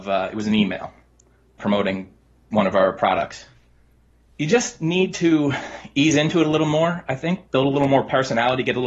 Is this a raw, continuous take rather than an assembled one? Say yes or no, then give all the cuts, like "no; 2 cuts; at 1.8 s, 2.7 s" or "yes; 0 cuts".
yes; 0 cuts